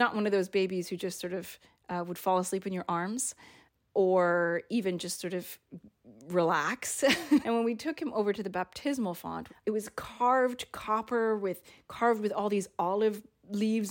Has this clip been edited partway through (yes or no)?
yes